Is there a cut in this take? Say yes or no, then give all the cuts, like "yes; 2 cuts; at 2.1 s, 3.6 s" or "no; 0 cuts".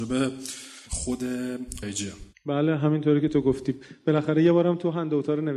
yes; 1 cut; at 1.8 s